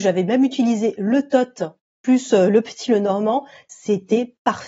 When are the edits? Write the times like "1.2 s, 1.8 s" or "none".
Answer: none